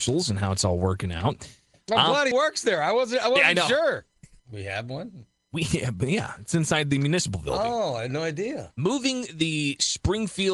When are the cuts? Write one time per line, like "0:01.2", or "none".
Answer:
0:02.3
0:04.4